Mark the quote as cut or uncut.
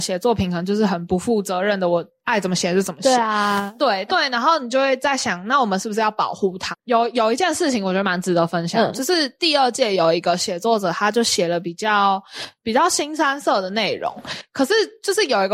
cut